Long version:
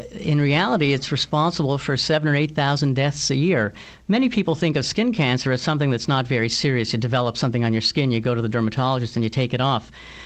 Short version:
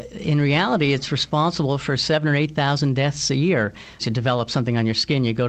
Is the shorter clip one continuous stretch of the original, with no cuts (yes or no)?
no